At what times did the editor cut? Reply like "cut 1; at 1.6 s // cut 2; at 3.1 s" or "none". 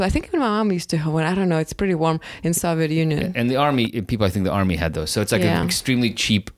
none